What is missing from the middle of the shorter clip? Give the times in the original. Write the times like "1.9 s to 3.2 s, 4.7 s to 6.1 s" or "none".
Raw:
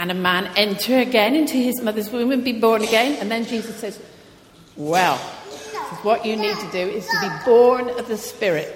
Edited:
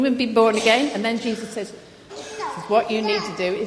4.4 s to 5.4 s